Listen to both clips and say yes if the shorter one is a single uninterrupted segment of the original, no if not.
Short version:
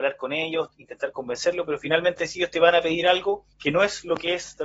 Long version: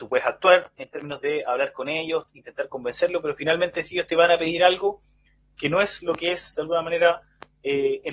no